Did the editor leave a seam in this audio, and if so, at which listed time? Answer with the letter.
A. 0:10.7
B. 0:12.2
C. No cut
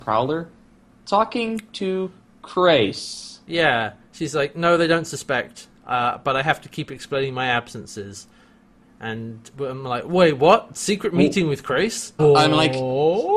B